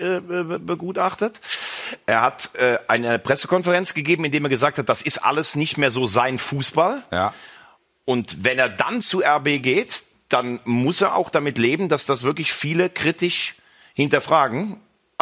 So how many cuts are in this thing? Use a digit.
1